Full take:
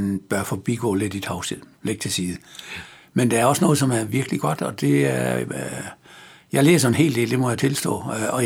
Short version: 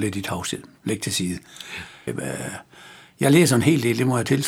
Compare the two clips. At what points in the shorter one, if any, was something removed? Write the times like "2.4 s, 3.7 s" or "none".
2.1 s

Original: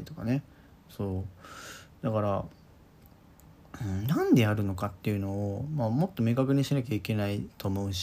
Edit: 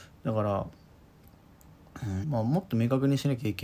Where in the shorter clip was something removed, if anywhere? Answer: 2.2 s

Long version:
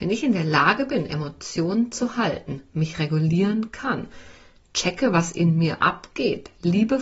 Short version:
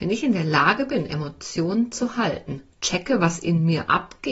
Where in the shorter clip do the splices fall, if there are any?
2.7 s

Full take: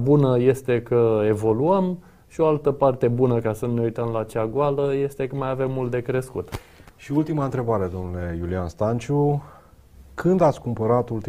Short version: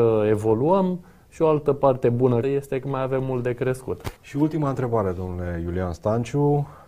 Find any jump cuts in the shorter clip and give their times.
2.4 s, 4.2 s

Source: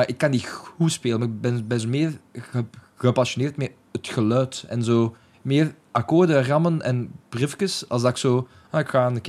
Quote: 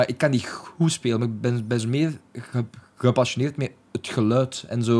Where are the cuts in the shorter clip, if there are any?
none

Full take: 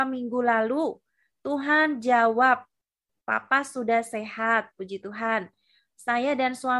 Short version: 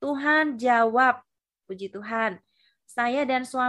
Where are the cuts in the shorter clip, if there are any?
1.6 s

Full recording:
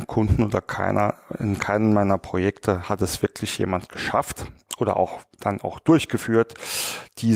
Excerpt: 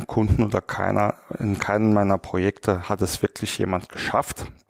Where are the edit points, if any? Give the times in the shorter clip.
none

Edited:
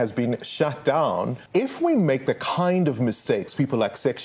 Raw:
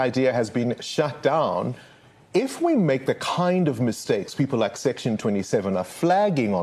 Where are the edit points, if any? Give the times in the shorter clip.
1.5 s

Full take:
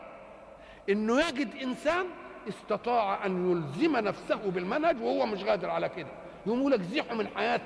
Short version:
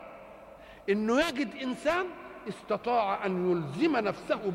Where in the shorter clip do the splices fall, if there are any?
none

